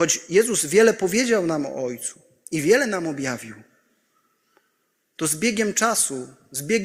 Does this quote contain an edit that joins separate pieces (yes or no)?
no